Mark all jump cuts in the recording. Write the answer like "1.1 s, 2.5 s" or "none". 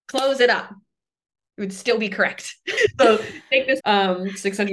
2.8 s, 3.8 s